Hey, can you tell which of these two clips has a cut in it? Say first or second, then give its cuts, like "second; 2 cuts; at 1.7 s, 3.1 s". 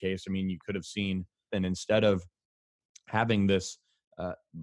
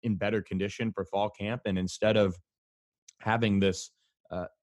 first; 1 cut; at 1.5 s